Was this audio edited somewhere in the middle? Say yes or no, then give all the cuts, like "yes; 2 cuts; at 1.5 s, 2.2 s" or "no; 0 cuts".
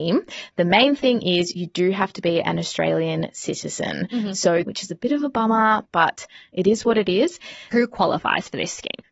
yes; 2 cuts; at 4.6 s, 7.7 s